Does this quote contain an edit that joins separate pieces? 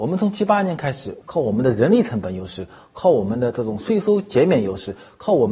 yes; 1 cut; at 1.2 s

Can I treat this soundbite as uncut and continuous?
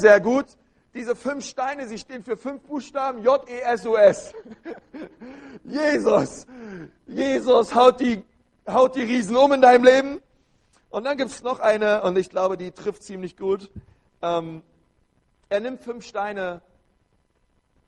no; 1 cut; at 11.4 s

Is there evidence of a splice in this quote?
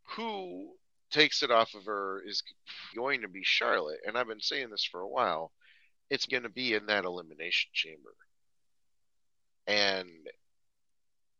yes; 2 cuts; at 2.9 s, 6.3 s

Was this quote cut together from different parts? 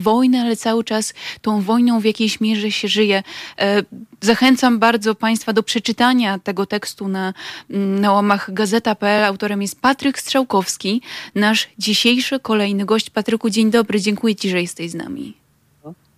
no; 0 cuts

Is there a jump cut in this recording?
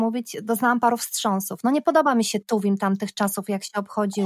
no; 0 cuts

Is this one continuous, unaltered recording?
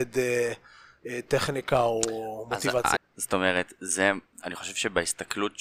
no; 1 cut; at 3.0 s

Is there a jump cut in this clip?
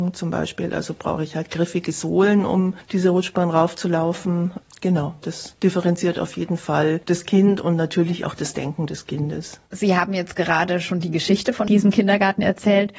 yes; 2 cuts; at 5.2 s, 9.6 s

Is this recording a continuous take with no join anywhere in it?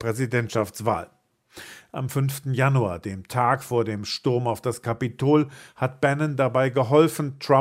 yes; 0 cuts

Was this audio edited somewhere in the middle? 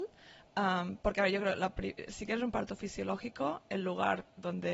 no; 0 cuts

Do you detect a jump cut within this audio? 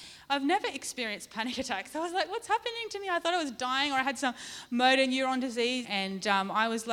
yes; 1 cut; at 5.8 s

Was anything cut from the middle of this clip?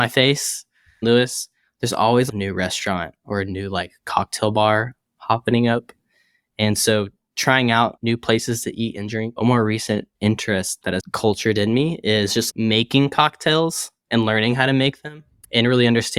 yes; 3 cuts; at 1.0 s, 9.4 s, 12.5 s

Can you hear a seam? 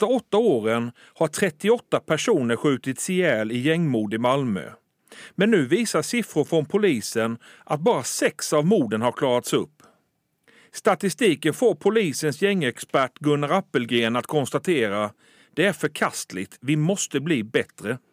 no; 0 cuts

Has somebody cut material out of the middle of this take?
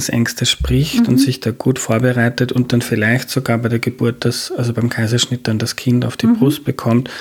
no; 0 cuts

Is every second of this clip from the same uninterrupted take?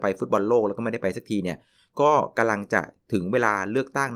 yes; 0 cuts

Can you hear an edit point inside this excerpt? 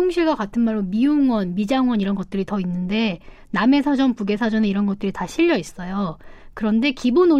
no; 0 cuts

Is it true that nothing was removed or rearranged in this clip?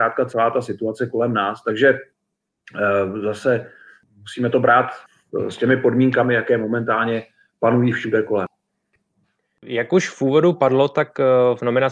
yes; 0 cuts

